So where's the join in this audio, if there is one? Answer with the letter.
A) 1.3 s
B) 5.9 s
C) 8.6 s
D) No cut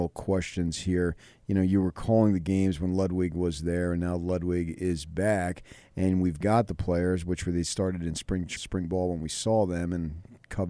C